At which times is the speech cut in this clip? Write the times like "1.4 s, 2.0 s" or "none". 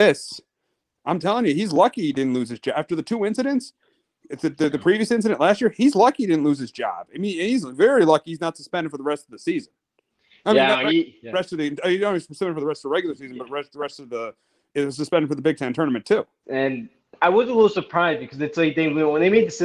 16.4 s